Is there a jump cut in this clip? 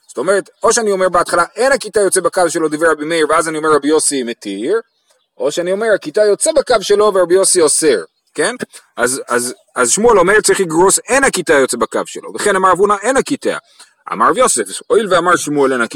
no; 0 cuts

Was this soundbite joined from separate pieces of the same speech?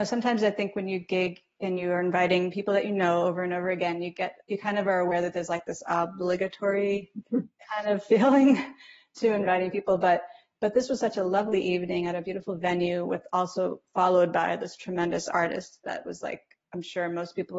yes; 1 cut; at 4.4 s

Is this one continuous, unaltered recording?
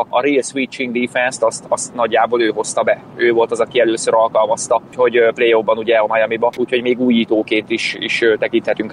no; 1 cut; at 6.6 s

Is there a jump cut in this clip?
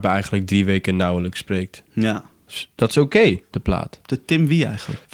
yes; 1 cut; at 3.5 s

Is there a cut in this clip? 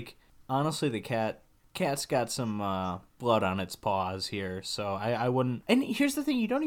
no; 0 cuts

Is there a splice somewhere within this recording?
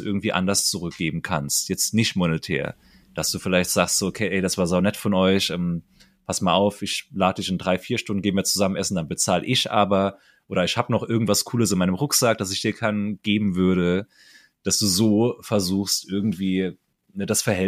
no; 0 cuts

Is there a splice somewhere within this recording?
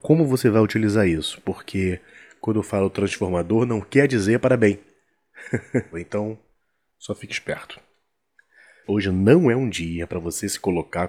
yes; 2 cuts; at 5.9 s, 8.8 s

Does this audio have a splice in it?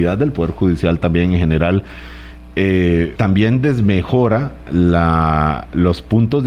yes; 2 cuts; at 3.2 s, 4.7 s

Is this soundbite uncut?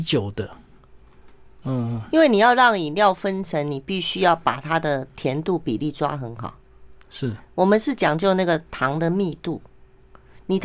no; 1 cut; at 1.6 s

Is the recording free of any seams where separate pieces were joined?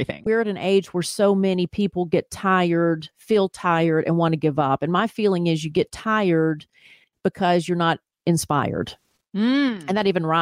yes; 0 cuts

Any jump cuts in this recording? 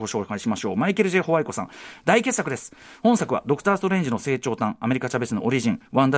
no; 0 cuts

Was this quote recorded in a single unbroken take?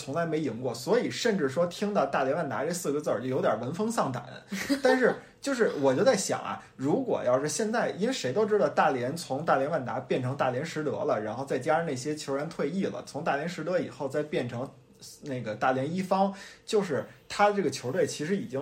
yes; 0 cuts

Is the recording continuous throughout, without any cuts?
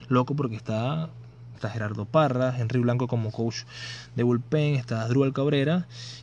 no; 1 cut; at 1.5 s

